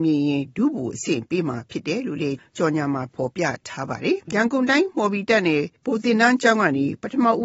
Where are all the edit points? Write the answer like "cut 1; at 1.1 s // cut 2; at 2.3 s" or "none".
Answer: cut 1; at 4.2 s // cut 2; at 5.8 s